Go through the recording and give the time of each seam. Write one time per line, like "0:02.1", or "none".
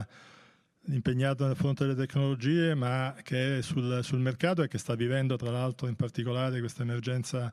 none